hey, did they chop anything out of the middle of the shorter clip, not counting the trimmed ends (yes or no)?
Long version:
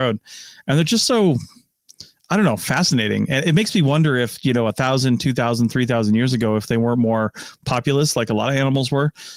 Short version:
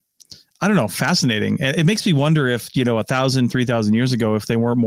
yes